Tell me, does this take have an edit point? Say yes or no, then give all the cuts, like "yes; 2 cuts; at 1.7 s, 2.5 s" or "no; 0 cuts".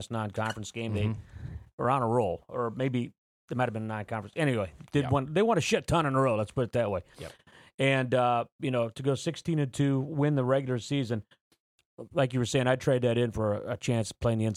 yes; 1 cut; at 4.8 s